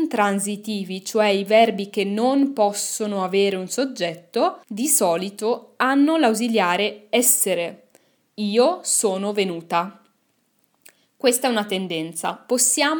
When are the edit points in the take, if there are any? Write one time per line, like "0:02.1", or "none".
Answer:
0:04.6